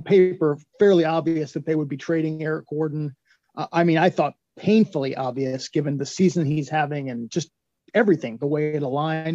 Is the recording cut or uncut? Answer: uncut